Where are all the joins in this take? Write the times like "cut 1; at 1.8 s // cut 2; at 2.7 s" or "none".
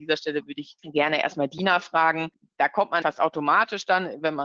cut 1; at 3.0 s